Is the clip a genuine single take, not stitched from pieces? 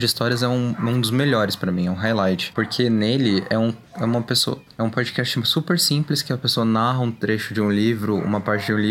no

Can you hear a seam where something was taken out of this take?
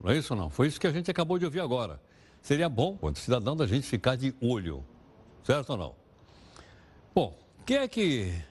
yes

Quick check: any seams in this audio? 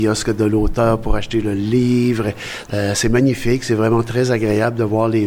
yes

